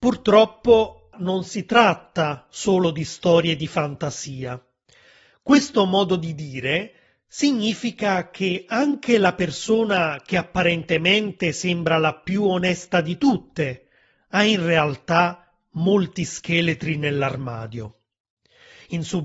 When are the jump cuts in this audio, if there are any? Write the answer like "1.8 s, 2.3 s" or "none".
1.1 s, 5.3 s